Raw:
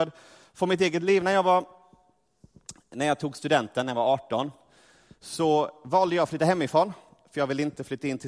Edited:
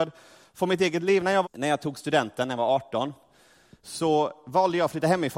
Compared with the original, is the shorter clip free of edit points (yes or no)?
no